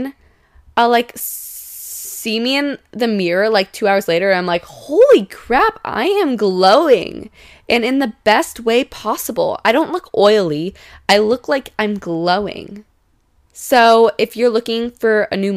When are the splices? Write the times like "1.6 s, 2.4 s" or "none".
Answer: none